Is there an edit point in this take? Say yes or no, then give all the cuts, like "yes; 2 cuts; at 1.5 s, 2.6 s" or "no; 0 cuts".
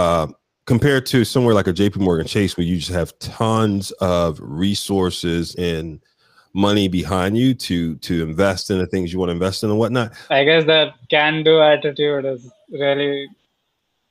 yes; 1 cut; at 10.3 s